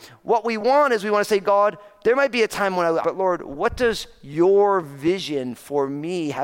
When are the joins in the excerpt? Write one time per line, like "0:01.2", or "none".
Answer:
0:03.0

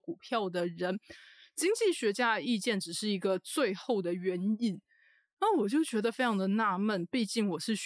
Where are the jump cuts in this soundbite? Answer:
none

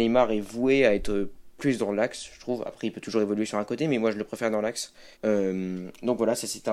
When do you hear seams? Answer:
0:05.1

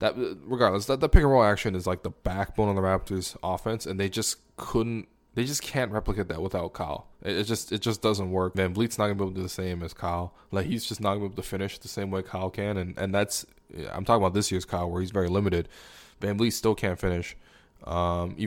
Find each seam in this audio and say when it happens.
0:08.5

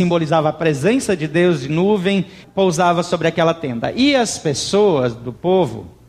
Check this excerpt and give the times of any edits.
0:02.4

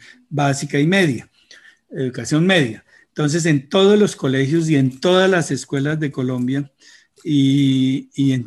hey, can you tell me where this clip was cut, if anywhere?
none

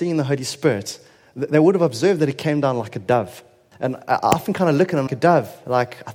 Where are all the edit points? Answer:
0:03.7
0:05.1

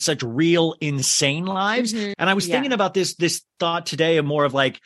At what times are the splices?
0:02.1

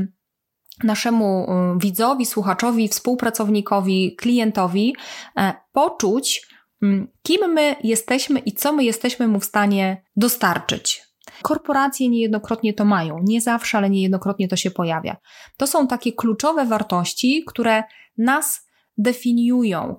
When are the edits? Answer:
0:10.1
0:11.4

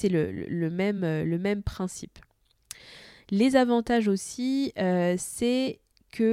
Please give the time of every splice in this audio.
none

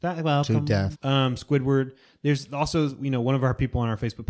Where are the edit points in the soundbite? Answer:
0:00.9

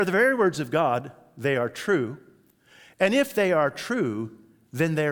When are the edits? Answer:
none

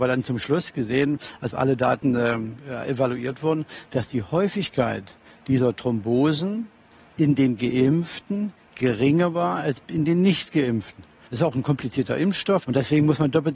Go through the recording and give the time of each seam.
0:11.3
0:12.6

